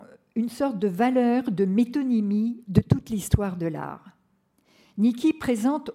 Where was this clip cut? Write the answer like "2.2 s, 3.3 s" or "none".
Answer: none